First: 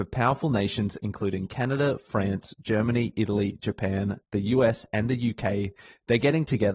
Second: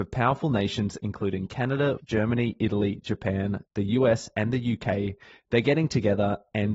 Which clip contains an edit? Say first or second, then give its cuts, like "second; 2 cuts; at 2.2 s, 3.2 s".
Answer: second; 1 cut; at 2.0 s